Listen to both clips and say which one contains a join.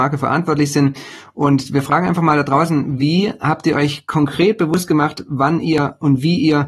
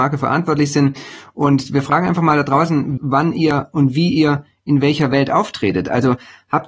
second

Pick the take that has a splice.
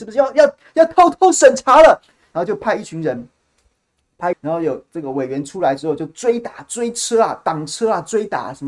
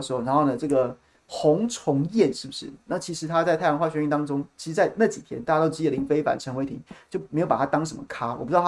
first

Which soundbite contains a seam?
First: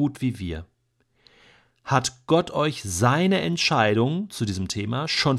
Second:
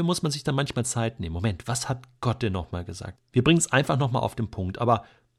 second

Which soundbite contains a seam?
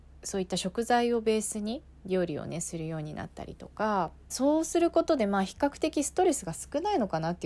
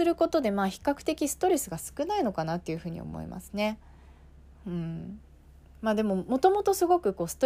first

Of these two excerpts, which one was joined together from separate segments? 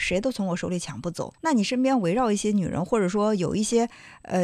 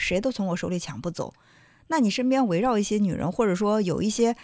first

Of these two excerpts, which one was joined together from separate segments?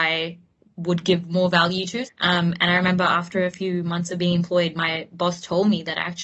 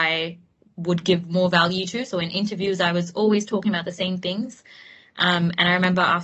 first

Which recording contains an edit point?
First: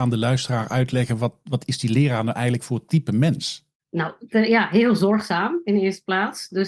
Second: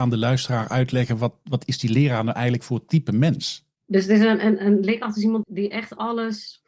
second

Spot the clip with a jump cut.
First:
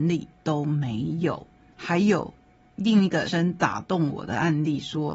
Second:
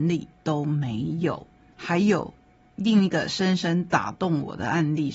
first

